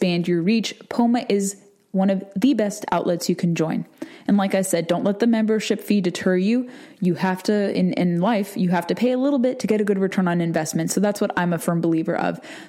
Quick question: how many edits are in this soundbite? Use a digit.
0